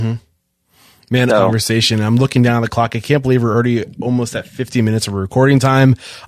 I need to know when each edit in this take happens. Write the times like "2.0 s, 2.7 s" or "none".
1.3 s